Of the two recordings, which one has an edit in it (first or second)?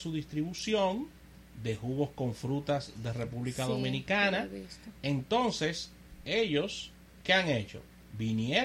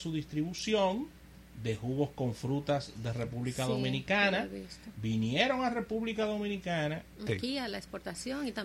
second